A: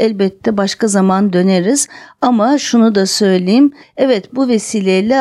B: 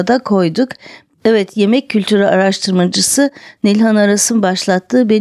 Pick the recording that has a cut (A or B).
A